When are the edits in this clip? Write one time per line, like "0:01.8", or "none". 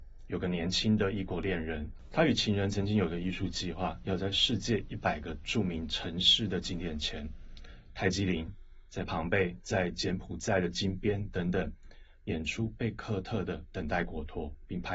none